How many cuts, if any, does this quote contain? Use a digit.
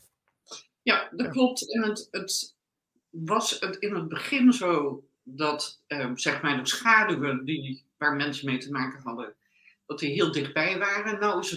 0